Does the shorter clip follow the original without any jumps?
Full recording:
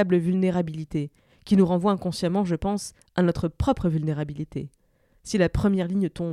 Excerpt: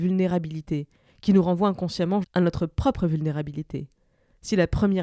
no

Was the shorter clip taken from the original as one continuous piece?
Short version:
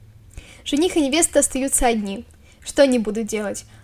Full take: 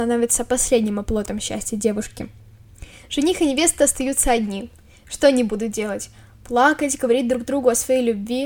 yes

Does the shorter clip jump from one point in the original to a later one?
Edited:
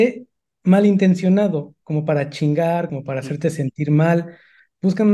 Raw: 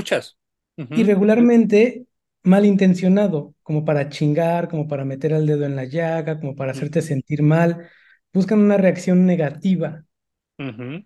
yes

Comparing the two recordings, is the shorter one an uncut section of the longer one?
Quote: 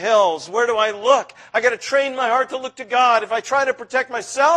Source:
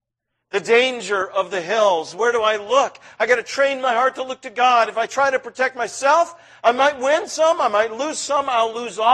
yes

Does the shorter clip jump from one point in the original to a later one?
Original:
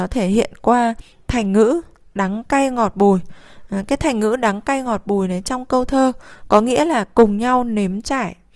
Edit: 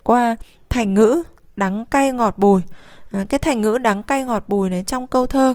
no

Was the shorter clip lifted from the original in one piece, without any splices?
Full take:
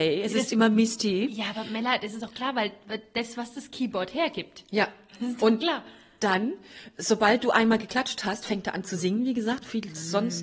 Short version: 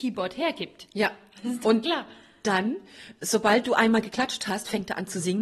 yes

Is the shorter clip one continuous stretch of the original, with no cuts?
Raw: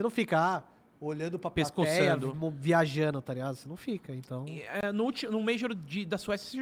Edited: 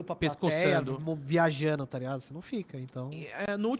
yes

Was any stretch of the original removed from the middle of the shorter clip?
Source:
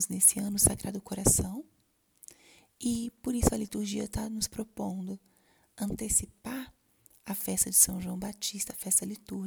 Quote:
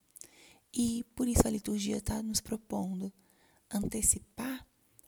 no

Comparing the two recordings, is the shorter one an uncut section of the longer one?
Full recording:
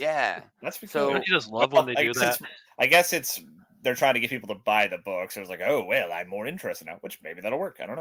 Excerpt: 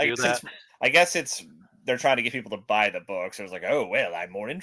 yes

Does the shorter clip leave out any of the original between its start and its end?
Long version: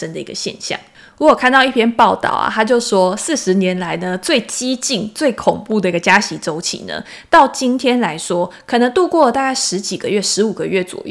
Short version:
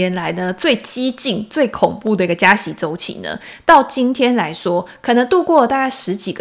no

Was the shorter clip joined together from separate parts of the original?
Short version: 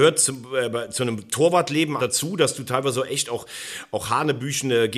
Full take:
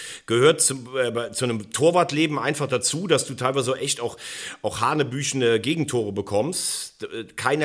yes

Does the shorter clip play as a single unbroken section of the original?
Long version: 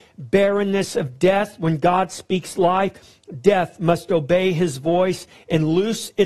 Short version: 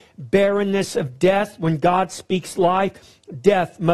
yes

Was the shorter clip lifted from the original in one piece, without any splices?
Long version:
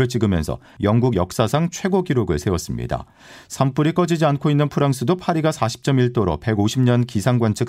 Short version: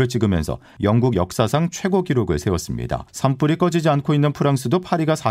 no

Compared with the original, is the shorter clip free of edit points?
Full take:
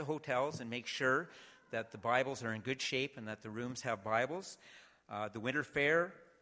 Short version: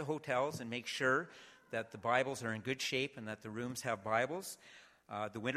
yes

